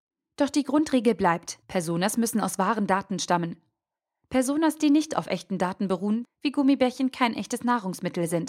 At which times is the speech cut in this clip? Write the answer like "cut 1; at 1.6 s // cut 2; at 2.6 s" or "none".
cut 1; at 6.2 s

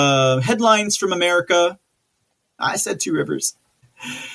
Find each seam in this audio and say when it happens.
cut 1; at 2.6 s

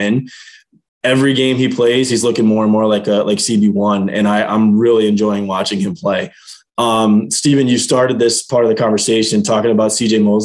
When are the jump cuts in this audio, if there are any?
none

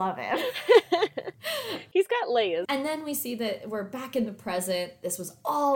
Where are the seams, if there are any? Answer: cut 1; at 2.6 s

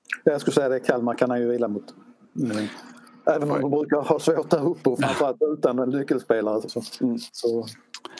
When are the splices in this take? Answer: cut 1; at 6.7 s

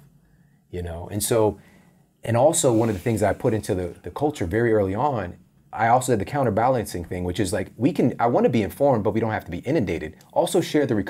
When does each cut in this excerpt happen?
none

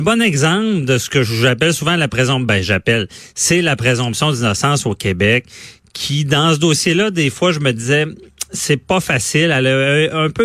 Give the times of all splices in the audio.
none

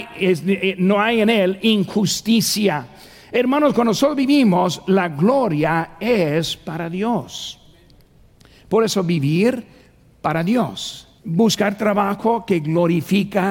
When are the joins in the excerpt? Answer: cut 1; at 11.2 s

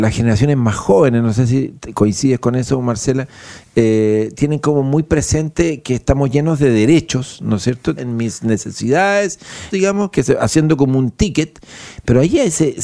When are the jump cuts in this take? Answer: cut 1; at 8.0 s // cut 2; at 9.7 s

